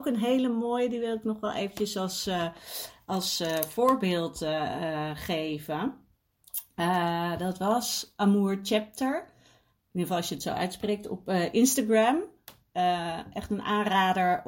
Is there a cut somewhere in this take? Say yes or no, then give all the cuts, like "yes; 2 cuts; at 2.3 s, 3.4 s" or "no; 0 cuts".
no; 0 cuts